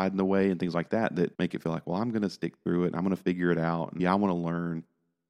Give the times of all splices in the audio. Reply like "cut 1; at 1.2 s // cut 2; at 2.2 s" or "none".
cut 1; at 1.3 s // cut 2; at 4.0 s